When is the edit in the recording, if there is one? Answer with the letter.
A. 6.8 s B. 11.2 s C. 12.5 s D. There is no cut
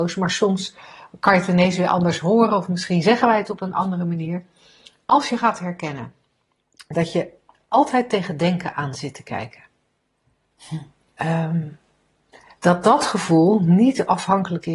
B